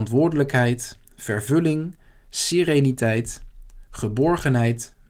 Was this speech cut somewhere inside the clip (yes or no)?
no